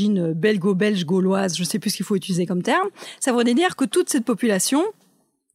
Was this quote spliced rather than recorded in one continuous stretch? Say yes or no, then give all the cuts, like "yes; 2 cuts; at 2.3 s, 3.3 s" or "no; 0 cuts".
no; 0 cuts